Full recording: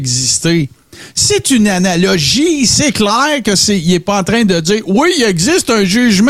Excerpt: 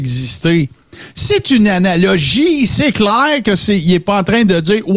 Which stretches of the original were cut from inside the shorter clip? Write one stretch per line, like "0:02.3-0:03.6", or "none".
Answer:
none